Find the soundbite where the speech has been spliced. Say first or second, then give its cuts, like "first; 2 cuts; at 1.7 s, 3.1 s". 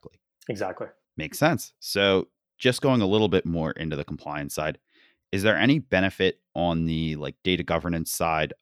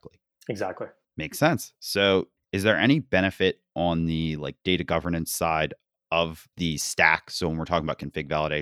second; 2 cuts; at 2.4 s, 6.5 s